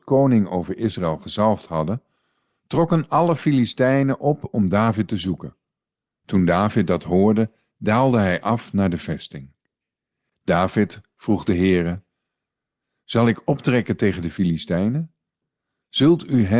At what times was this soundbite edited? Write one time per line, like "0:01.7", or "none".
0:10.3

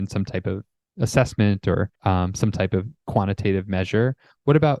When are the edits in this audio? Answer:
0:02.0

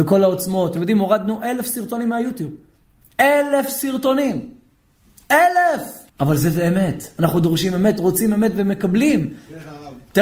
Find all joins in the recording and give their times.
0:06.1

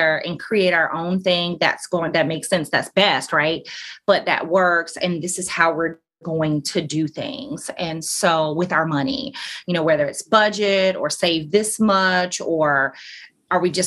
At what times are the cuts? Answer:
none

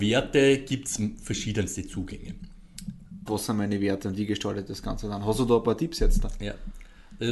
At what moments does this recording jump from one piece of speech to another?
0:03.3

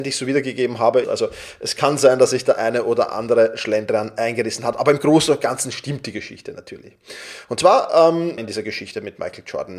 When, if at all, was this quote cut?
0:01.0
0:08.4

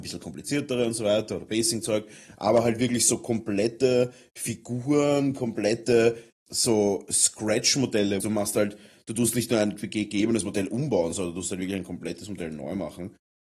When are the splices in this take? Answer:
0:06.3
0:08.2

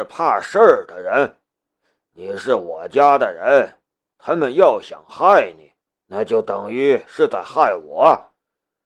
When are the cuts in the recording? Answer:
none

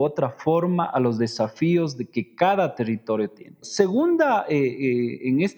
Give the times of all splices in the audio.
0:03.6

